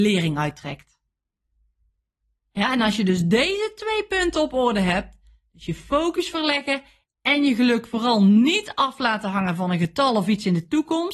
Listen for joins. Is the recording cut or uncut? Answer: cut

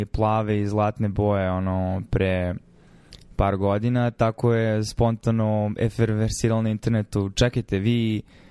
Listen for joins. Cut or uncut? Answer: uncut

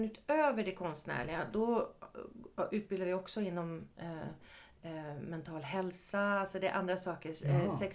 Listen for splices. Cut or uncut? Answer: uncut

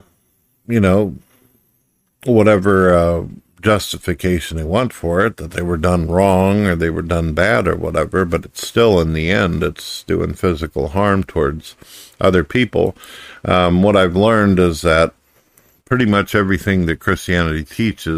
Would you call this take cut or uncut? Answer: uncut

